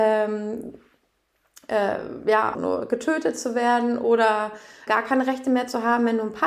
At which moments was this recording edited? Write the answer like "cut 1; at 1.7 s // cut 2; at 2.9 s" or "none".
cut 1; at 2.5 s // cut 2; at 4.9 s